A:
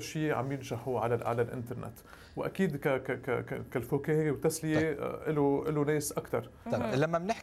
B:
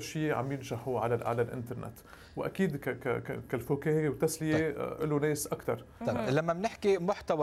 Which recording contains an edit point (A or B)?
B